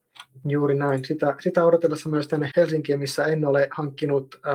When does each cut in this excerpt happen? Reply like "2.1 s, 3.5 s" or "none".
2.5 s